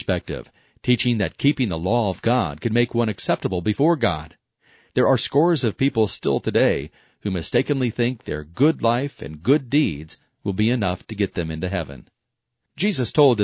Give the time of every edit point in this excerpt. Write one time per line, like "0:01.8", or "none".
none